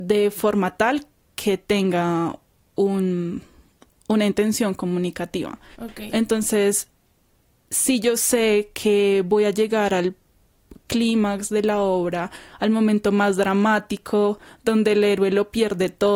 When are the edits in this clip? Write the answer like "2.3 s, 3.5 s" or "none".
none